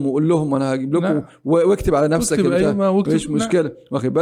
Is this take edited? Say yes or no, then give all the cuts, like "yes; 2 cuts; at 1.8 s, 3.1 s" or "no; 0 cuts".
no; 0 cuts